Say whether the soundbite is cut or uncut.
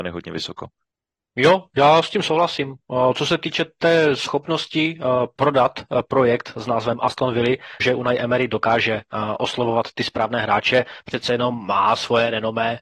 cut